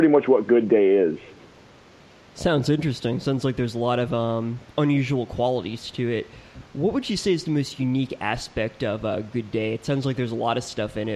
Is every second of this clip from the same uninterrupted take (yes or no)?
yes